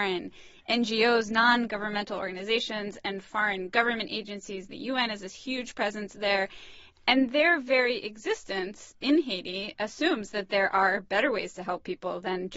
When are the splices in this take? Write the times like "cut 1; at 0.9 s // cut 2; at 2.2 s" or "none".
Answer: none